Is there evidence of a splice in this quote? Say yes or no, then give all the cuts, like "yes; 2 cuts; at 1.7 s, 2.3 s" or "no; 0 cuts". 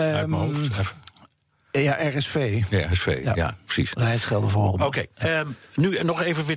no; 0 cuts